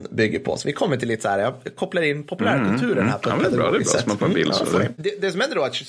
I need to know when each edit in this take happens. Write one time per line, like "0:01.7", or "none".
none